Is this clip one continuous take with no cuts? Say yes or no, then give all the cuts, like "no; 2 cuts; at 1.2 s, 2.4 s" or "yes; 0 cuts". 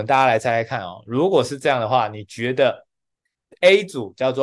yes; 0 cuts